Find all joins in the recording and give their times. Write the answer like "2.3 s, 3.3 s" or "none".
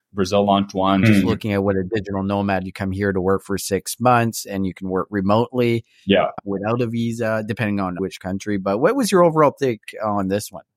1.0 s, 6.4 s